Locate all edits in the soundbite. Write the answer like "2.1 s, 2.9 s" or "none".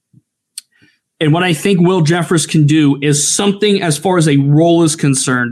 none